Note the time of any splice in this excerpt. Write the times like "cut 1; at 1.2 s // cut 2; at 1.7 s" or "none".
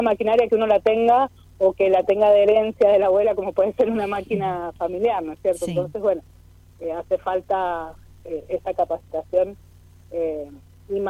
none